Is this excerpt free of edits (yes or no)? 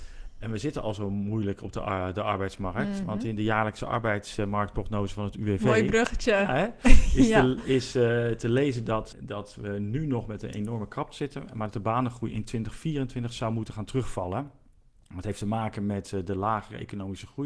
no